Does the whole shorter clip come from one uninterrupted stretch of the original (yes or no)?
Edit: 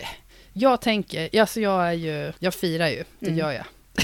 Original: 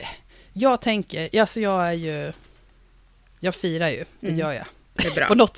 no